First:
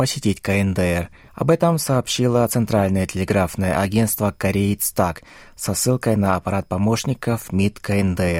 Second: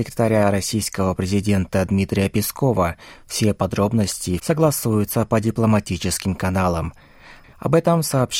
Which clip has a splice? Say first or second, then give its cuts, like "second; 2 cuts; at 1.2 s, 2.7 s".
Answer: second; 2 cuts; at 4.4 s, 7.4 s